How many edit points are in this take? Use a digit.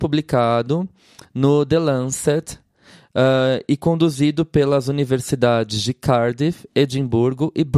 0